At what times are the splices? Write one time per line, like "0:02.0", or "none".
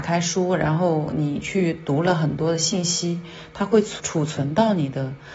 0:04.0